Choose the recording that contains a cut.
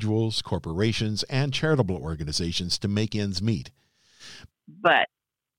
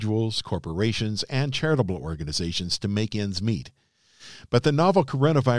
first; 1 cut; at 4.5 s

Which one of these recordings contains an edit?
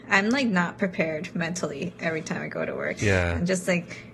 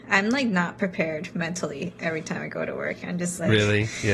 first; 1 cut; at 3.0 s

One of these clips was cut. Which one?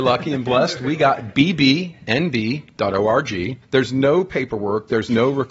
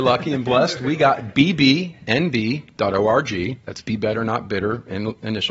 first; 1 cut; at 3.6 s

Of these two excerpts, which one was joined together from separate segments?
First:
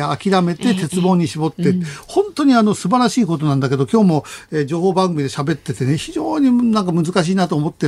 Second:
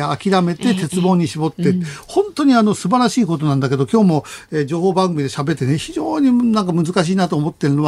second; 1 cut; at 5.6 s

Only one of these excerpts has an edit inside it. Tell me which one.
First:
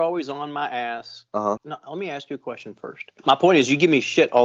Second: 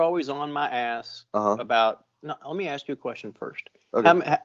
first; 2 cuts; at 1.6 s, 3.2 s

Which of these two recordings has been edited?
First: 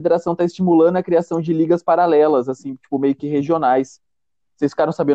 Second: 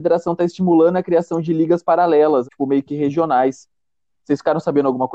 second; 1 cut; at 2.4 s

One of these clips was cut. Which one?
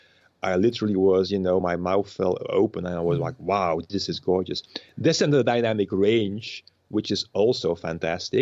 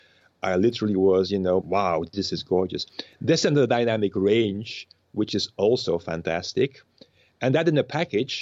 second; 1 cut; at 1.6 s

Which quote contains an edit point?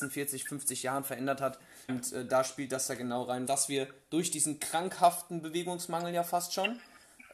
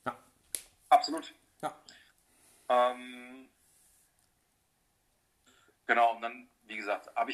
first; 2 cuts; at 1.9 s, 3.5 s

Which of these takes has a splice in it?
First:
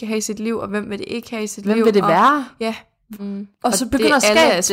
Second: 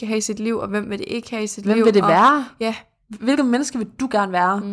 first; 1 cut; at 3.2 s

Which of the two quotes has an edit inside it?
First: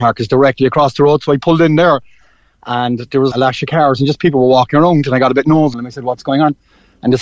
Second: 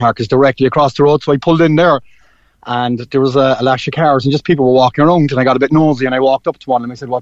first; 2 cuts; at 3.3 s, 5.7 s

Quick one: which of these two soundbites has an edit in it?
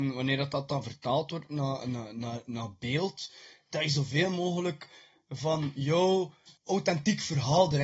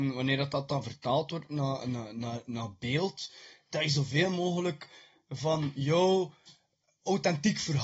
first; 1 cut; at 6.6 s

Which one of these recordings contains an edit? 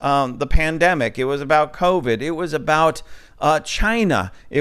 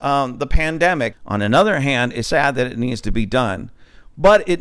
second; 2 cuts; at 1.1 s, 2.2 s

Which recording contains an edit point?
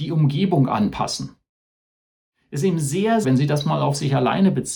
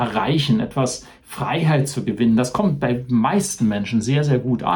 first; 1 cut; at 3.2 s

